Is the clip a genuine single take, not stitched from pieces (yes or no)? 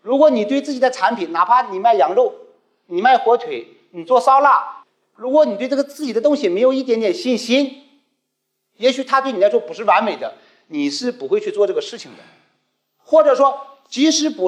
yes